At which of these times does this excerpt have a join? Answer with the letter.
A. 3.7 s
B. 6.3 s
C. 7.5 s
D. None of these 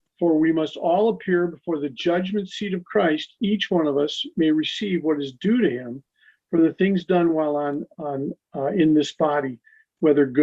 D